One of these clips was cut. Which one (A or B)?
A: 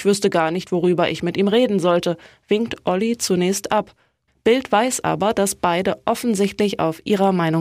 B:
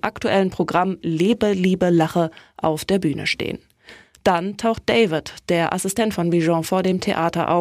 A